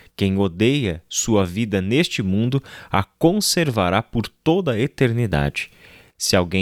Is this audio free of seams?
yes; 0 cuts

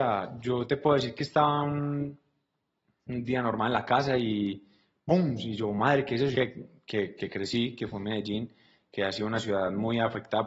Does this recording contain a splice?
yes; 1 cut; at 6.3 s

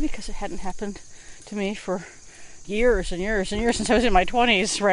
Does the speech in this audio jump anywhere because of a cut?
yes; 1 cut; at 2.6 s

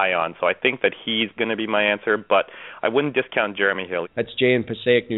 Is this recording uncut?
no; 2 cuts; at 1.4 s, 4.0 s

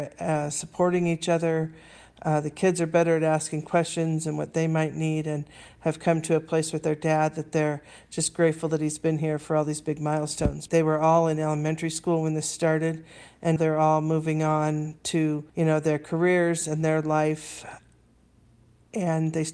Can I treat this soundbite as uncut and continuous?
no; 3 cuts; at 10.7 s, 13.6 s, 15.5 s

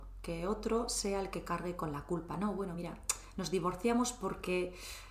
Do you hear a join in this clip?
no; 0 cuts

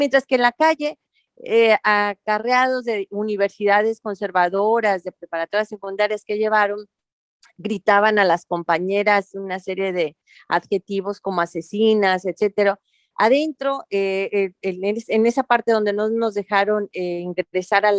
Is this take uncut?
yes; 0 cuts

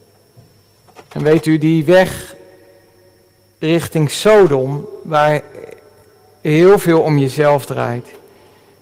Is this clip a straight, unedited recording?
no; 1 cut; at 1.1 s

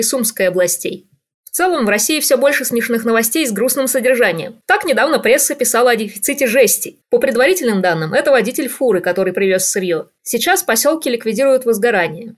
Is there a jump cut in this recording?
yes; 1 cut; at 7.0 s

